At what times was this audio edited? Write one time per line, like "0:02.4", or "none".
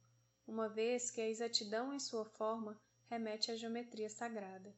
none